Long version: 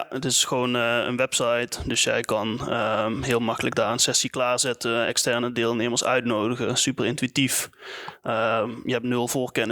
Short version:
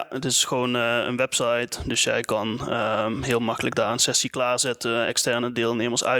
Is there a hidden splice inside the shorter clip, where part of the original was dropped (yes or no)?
no